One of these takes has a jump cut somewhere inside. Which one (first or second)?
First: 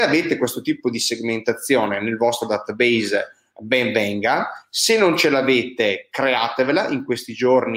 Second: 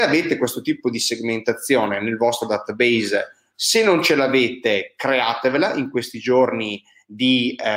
second